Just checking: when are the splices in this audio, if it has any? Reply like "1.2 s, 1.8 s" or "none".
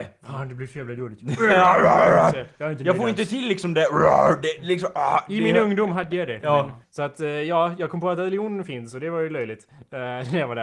6.8 s